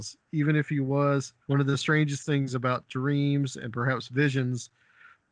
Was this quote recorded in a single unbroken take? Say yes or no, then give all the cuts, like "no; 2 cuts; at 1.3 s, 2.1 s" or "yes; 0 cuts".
no; 1 cut; at 1.4 s